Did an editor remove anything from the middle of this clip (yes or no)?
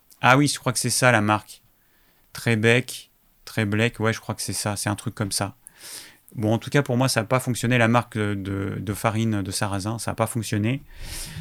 no